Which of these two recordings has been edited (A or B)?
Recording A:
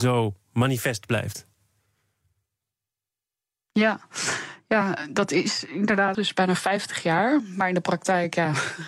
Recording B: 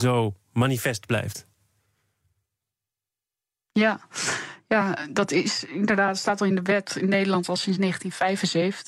A